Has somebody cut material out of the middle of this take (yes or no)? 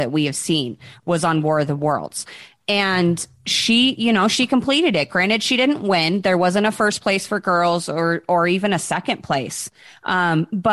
no